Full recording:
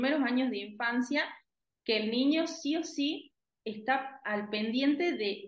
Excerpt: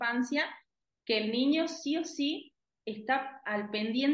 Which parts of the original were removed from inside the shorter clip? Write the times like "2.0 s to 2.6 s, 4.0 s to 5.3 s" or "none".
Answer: none